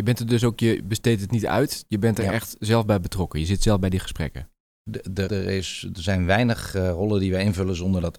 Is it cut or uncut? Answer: cut